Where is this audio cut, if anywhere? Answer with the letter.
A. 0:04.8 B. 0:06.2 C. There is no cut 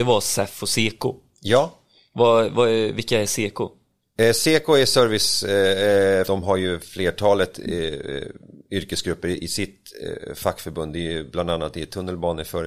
B